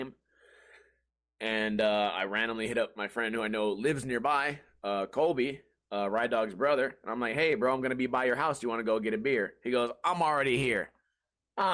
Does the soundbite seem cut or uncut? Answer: uncut